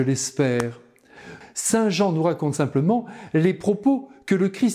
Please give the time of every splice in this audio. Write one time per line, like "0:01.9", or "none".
0:01.4